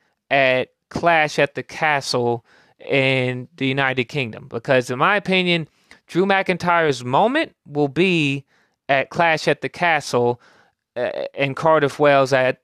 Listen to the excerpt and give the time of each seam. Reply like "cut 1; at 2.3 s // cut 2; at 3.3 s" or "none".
none